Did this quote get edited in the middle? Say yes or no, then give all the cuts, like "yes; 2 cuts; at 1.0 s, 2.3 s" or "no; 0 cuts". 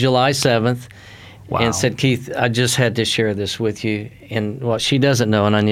no; 0 cuts